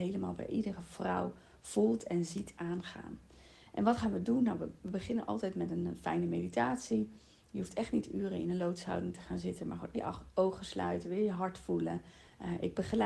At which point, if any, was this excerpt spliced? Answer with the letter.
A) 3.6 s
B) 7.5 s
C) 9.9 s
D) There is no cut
C